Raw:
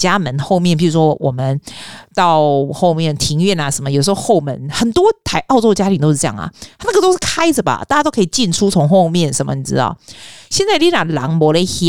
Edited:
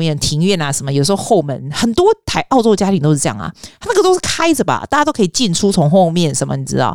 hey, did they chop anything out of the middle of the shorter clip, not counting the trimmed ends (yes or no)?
no